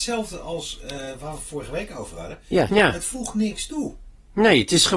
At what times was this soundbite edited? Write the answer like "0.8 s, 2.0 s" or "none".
2.7 s